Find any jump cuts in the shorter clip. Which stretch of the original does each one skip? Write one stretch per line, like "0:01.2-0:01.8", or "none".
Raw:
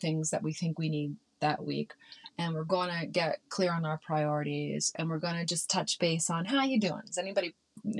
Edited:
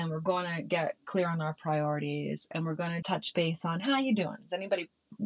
0:05.5-0:05.7